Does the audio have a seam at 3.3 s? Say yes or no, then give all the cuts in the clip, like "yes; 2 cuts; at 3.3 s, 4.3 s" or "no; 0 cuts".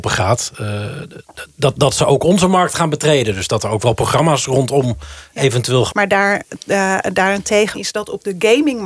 no; 2 cuts; at 5.9 s, 7.7 s